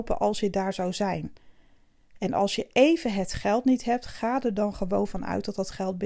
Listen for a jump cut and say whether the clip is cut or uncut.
uncut